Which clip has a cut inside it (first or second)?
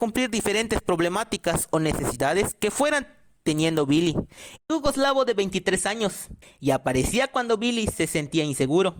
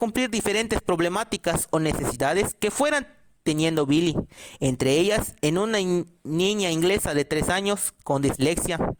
first